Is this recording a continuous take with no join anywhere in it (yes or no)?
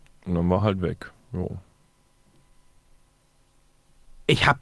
yes